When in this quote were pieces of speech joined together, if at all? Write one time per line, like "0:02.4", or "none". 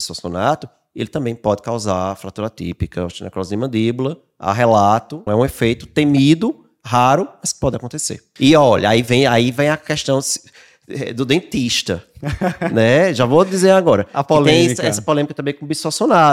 0:05.3
0:08.4